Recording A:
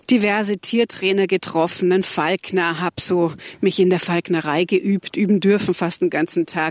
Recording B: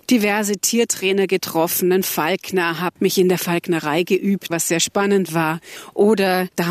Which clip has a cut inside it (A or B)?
B